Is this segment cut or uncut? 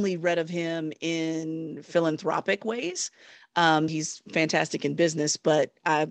cut